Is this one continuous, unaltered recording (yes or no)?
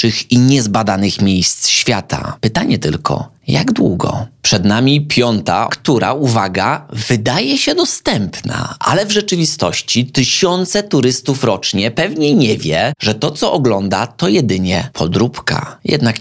no